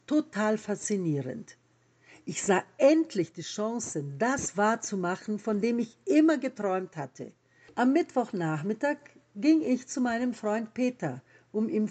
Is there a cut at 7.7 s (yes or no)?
yes